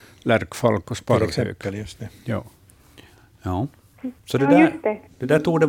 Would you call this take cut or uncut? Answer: cut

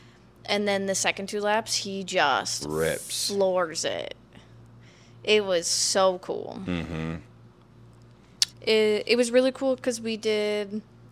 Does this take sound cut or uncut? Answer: cut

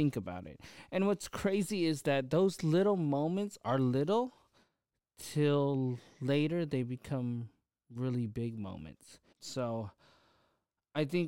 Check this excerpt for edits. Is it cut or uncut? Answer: cut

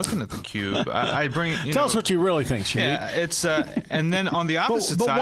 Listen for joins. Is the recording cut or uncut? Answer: uncut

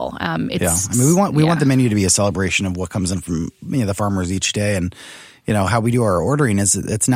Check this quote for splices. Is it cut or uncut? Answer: uncut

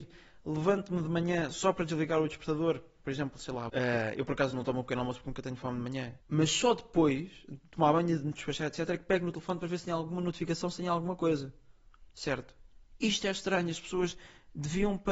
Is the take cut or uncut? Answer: cut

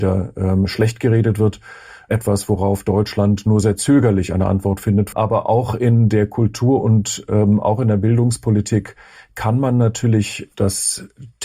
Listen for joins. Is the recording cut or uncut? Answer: cut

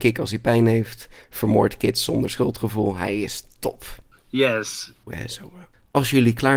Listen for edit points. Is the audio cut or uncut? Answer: cut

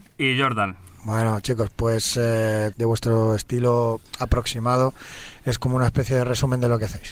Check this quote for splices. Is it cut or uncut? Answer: cut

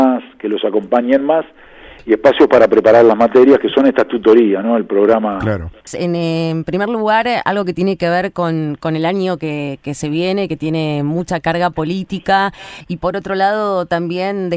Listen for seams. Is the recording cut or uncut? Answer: cut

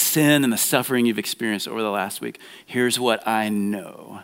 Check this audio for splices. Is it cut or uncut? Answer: uncut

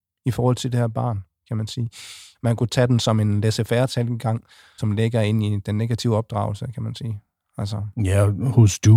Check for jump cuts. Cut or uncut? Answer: cut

